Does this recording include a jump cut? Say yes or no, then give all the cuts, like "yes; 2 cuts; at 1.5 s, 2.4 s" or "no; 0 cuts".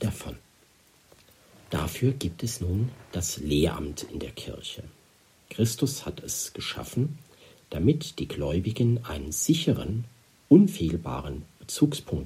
no; 0 cuts